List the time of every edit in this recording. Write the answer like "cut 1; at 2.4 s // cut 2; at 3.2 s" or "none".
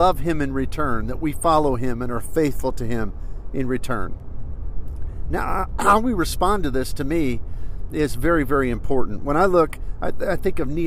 none